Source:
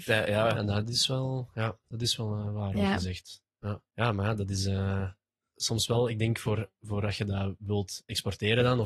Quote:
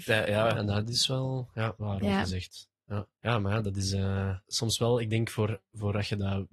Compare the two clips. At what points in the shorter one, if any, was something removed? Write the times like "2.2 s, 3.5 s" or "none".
1.8 s, 4.4 s

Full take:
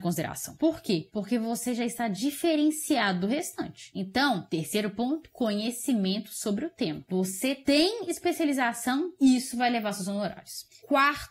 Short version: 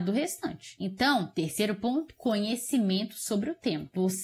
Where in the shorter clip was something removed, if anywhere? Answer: none

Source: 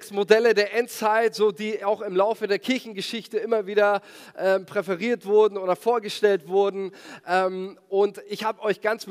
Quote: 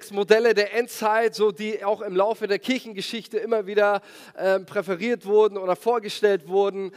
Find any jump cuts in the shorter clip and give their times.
none

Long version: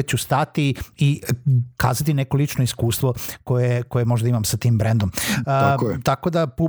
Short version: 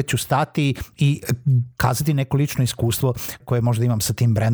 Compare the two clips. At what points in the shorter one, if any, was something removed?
3.4 s

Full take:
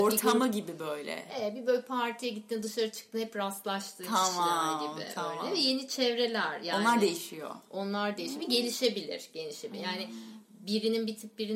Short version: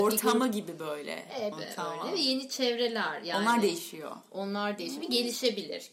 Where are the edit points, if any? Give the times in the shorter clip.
1.5 s

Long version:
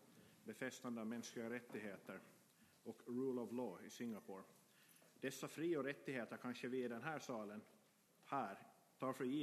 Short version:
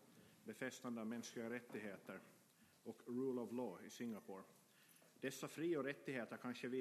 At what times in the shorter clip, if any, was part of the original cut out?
none

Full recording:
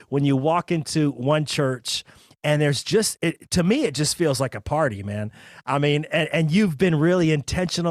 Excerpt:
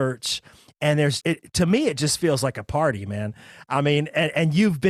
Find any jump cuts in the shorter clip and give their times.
1.2 s

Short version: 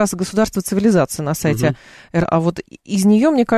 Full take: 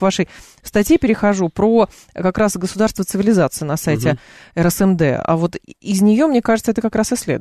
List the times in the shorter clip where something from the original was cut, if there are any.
2.2 s

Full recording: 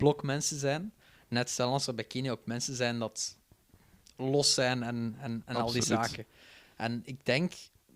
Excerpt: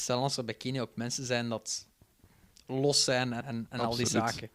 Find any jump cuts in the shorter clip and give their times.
3.4 s

